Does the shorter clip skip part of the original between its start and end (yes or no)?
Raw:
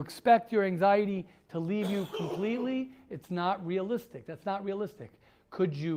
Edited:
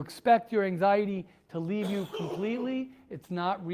no